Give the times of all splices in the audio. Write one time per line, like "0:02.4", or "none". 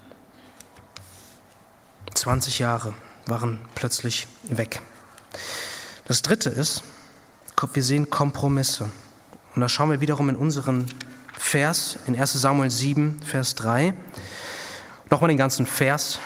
none